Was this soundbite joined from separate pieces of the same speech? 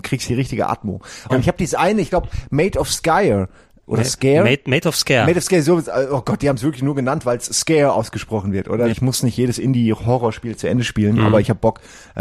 yes; 2 cuts; at 1.3 s, 8.9 s

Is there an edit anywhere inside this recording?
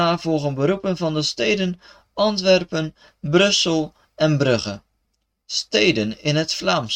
no; 0 cuts

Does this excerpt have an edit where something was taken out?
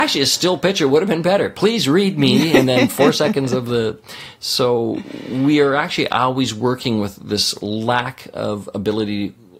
no; 0 cuts

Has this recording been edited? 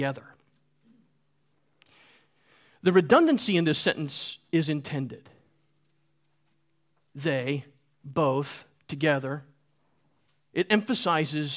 no; 0 cuts

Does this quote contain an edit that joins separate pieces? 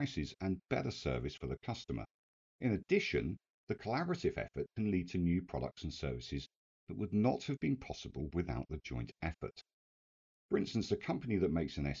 no; 0 cuts

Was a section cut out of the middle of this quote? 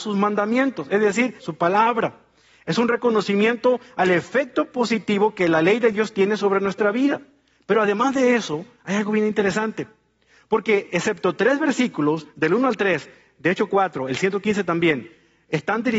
yes; 1 cut; at 1.4 s

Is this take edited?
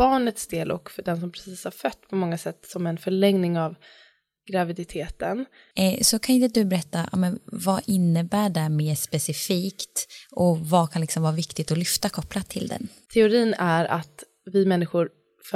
yes; 2 cuts; at 5.7 s, 13.1 s

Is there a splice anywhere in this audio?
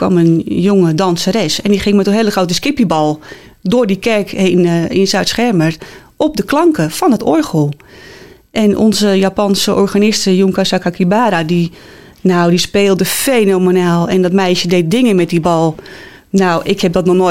no; 0 cuts

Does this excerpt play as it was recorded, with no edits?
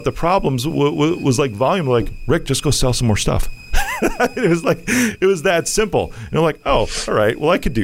yes; 0 cuts

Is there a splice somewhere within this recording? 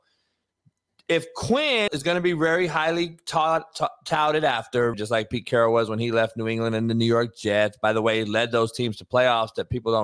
yes; 2 cuts; at 1.9 s, 4.9 s

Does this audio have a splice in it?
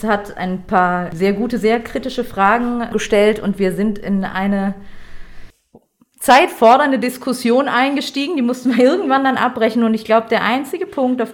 no; 0 cuts

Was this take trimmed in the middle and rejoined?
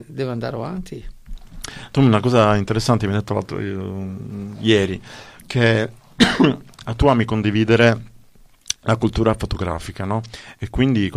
no; 0 cuts

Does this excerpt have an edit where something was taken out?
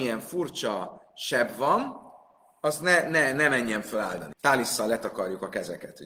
yes; 1 cut; at 4.3 s

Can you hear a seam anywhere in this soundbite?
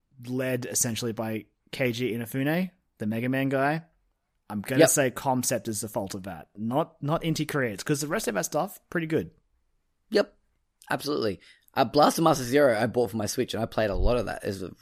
no; 0 cuts

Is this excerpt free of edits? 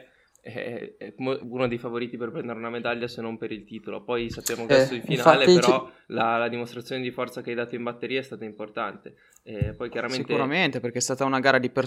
no; 2 cuts; at 1.4 s, 4.7 s

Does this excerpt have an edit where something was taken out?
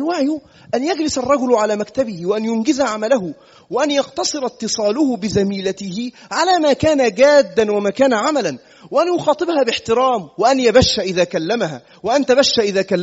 no; 0 cuts

